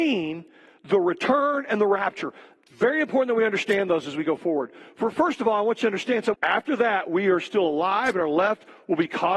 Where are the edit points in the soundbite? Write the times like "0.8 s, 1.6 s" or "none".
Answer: 6.3 s